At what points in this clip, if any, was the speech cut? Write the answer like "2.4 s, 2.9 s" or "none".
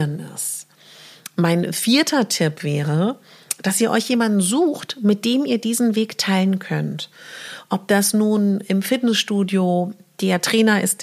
none